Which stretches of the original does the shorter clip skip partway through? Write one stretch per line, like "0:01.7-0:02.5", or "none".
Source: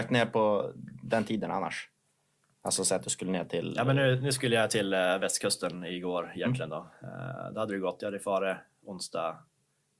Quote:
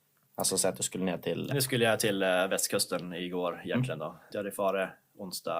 0:03.8-0:04.2
0:07.0-0:08.0